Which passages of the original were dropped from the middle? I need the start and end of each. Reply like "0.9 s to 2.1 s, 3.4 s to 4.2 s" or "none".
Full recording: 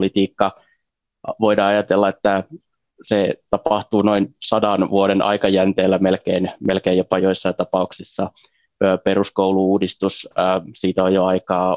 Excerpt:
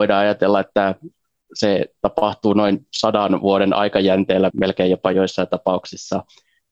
6.0 s to 6.6 s